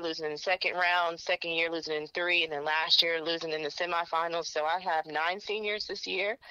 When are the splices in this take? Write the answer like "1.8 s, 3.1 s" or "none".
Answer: 4.4 s

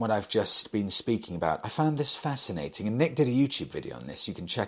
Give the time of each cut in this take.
none

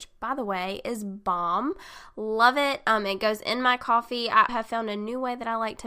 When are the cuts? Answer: 4.5 s

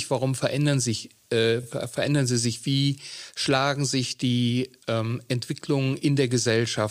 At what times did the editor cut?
none

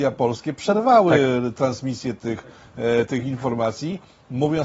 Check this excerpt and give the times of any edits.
none

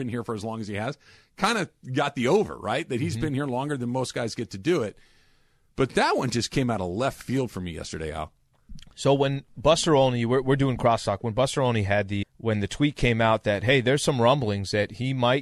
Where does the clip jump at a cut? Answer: 12.2 s

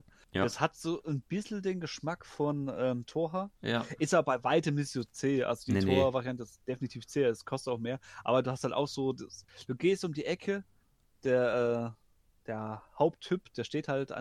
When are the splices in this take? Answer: 3.0 s

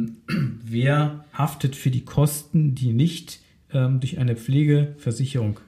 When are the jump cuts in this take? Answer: 1.3 s

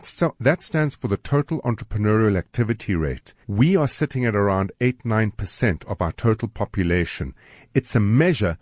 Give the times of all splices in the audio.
3.4 s

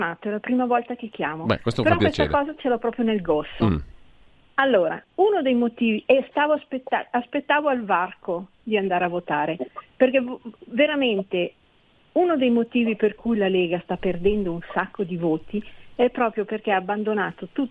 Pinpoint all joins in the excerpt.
none

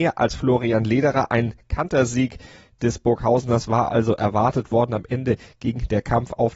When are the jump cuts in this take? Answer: none

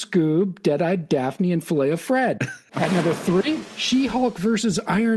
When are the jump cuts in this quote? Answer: 2.7 s

